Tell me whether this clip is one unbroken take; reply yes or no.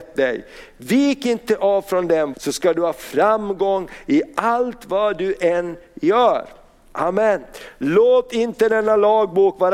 no